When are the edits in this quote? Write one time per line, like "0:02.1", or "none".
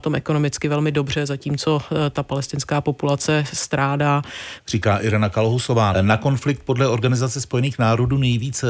0:04.6
0:05.9